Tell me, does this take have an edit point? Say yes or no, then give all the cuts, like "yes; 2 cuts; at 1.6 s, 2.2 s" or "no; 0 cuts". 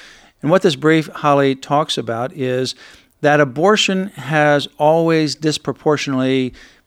no; 0 cuts